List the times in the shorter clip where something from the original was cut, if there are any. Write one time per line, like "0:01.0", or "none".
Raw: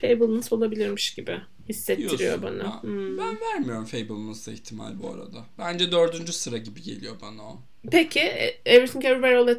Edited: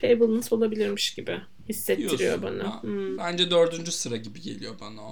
0:03.2